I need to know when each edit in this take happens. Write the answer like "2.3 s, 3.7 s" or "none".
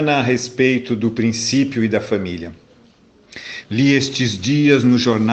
3.6 s